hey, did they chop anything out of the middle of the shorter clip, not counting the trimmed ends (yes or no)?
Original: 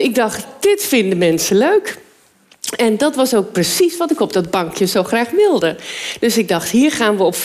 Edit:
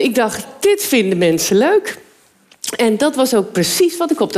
no